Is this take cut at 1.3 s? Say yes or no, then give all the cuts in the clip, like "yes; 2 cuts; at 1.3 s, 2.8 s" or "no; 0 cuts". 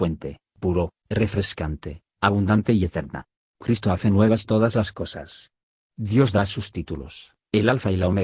no; 2 cuts; at 3.5 s, 5.8 s